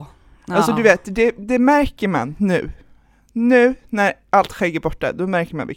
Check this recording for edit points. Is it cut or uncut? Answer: uncut